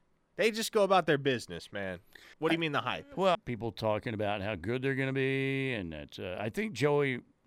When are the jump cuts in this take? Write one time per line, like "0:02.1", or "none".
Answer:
0:02.3
0:03.3